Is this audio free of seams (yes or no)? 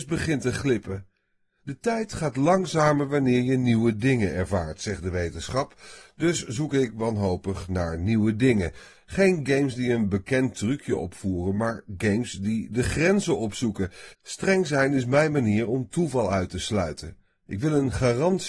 no